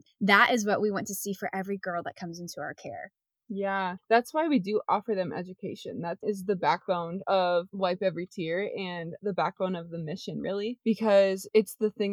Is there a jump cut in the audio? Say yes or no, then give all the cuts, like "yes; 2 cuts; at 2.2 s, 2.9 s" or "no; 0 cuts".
no; 0 cuts